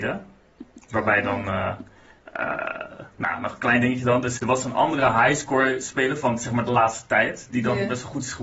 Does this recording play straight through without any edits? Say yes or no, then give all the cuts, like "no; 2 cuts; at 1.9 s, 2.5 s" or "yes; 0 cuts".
no; 1 cut; at 4.4 s